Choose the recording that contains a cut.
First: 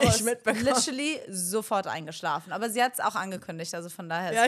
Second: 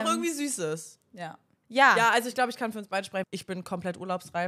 second; 2 cuts; at 1.6 s, 3.2 s

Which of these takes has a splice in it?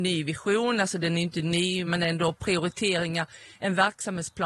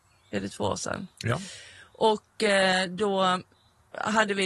first; 1 cut; at 1.9 s

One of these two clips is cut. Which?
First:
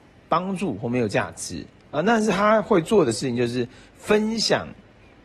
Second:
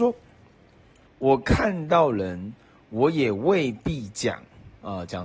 second; 1 cut; at 1.1 s

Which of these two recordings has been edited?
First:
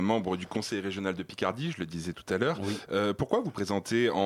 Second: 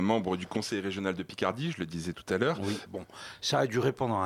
second; 1 cut; at 2.9 s

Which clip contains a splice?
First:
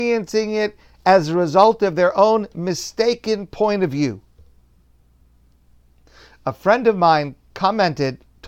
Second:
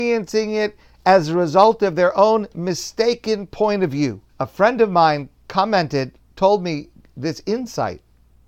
second; 1 cut; at 4.3 s

